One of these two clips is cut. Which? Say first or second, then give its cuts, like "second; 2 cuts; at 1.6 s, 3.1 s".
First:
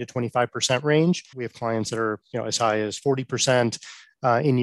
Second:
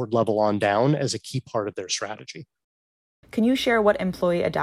first; 1 cut; at 1.3 s